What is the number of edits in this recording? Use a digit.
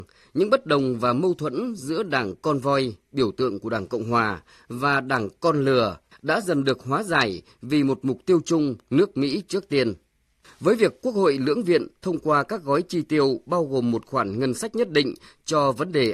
2